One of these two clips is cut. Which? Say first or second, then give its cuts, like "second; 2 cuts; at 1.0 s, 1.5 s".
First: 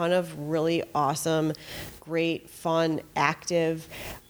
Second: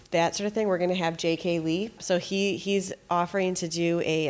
second; 1 cut; at 2.0 s